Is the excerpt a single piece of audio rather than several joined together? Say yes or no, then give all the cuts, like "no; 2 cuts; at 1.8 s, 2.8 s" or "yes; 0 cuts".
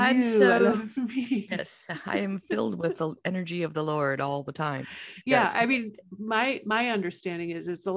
yes; 0 cuts